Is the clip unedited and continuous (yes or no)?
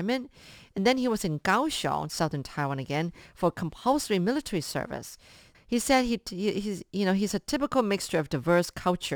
no